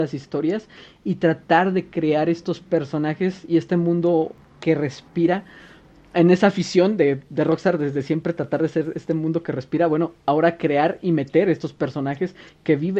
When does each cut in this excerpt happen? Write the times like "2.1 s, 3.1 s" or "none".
none